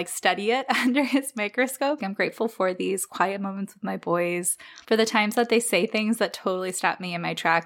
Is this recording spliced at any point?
yes; 2 cuts; at 2.0 s, 4.8 s

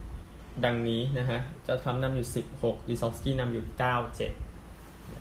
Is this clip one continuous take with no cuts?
yes; 0 cuts

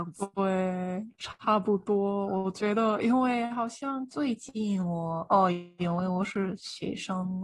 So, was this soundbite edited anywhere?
no; 0 cuts

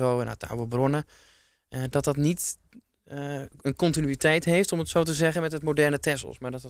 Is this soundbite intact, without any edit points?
yes; 0 cuts

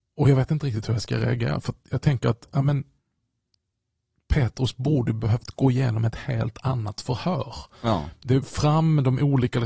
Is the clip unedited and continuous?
yes; 0 cuts

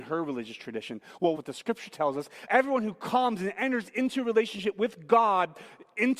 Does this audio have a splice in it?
yes; 2 cuts; at 1.4 s, 2.5 s

